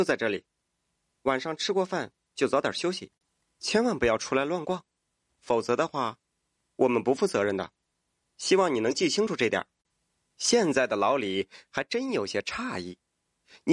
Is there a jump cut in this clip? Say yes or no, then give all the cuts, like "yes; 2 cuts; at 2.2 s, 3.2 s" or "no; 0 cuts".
no; 0 cuts